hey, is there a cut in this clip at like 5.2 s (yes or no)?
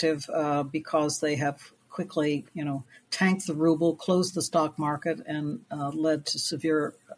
no